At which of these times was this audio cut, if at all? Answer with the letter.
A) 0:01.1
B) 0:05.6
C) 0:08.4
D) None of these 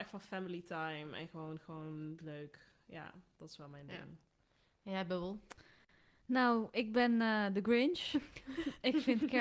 D